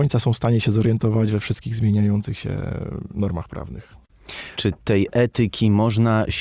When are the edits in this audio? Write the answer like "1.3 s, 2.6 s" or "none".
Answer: 4.5 s